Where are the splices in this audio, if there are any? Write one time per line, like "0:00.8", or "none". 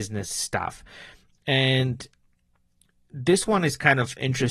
none